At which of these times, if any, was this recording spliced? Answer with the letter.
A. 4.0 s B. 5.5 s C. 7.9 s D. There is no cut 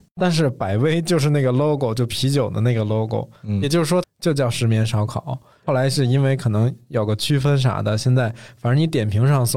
A